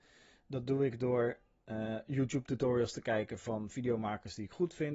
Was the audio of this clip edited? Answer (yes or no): no